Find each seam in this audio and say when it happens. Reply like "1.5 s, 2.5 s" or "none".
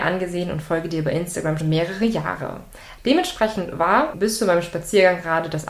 1.6 s, 3.0 s, 4.1 s